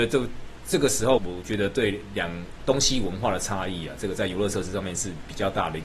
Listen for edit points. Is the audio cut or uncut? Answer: cut